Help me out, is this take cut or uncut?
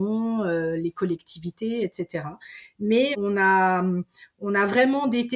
cut